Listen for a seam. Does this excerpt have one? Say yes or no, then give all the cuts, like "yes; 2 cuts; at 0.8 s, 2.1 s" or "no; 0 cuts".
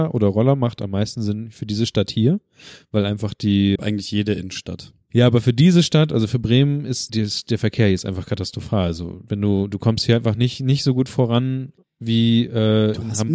yes; 2 cuts; at 3.8 s, 7.1 s